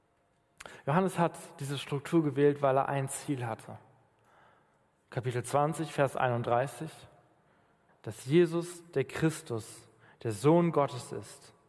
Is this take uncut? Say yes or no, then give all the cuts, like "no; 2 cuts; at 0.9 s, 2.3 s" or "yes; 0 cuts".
no; 1 cut; at 7.9 s